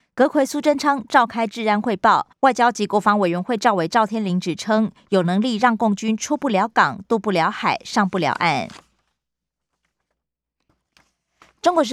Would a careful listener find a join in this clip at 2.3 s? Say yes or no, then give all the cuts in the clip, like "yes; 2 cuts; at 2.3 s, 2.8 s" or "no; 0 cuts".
yes; 1 cut; at 2.3 s